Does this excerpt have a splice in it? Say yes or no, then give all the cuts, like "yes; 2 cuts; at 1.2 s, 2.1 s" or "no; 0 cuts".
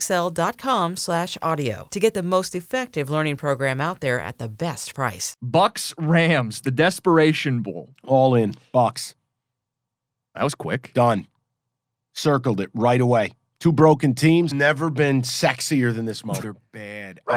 yes; 2 cuts; at 14.5 s, 16.4 s